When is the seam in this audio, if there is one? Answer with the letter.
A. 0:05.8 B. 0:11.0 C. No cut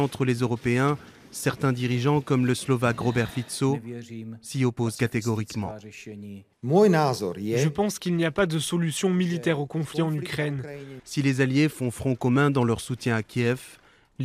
B